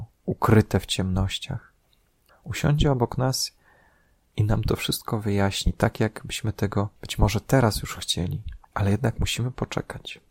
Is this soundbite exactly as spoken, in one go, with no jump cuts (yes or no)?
no